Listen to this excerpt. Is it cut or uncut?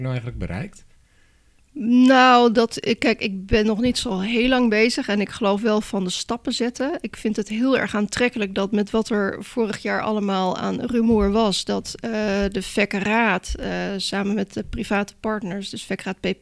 uncut